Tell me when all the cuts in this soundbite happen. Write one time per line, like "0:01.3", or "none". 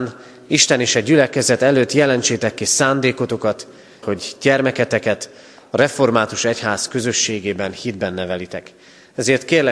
0:04.0